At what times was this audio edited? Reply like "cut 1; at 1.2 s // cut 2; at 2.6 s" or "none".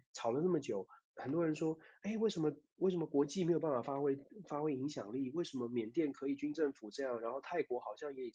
cut 1; at 1.0 s

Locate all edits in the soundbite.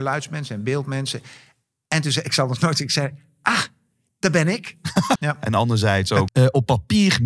cut 1; at 5.2 s // cut 2; at 6.3 s

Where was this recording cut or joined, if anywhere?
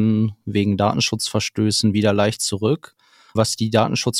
none

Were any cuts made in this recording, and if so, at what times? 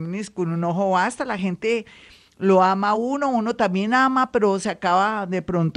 none

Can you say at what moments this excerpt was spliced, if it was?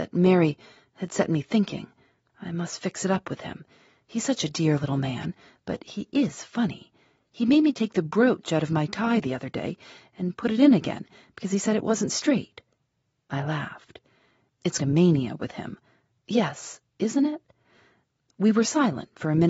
cut 1; at 2.3 s // cut 2; at 14.8 s

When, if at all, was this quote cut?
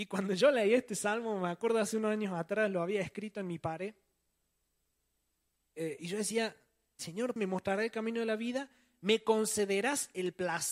cut 1; at 7.4 s

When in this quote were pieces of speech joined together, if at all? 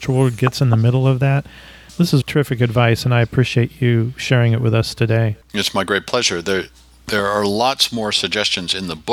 cut 1; at 2.2 s // cut 2; at 5.4 s

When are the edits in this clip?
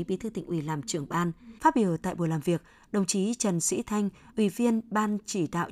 cut 1; at 1.6 s // cut 2; at 4.3 s

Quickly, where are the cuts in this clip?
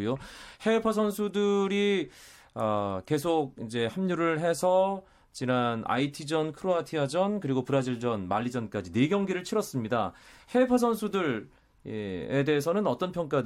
none

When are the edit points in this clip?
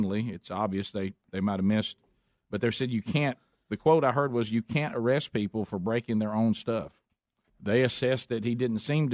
cut 1; at 7.5 s

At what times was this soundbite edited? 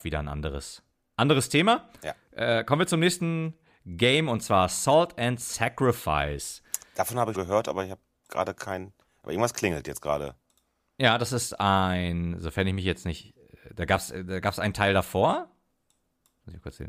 cut 1; at 7.3 s

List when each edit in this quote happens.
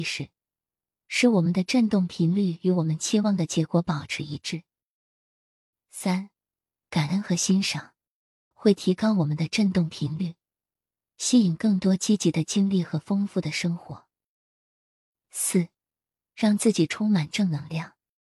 cut 1; at 8.5 s

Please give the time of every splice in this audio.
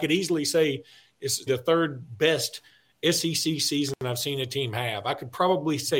cut 1; at 1.5 s

